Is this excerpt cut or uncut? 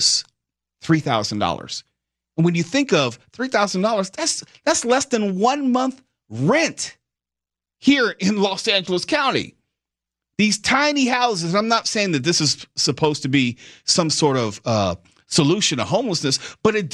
uncut